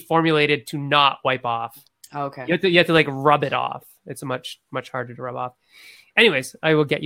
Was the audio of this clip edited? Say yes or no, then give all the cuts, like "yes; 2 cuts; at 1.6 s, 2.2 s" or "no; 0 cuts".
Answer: no; 0 cuts